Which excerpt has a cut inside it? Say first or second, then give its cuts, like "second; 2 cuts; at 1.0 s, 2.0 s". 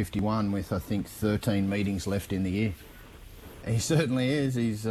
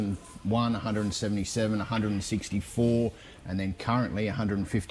first; 1 cut; at 3.6 s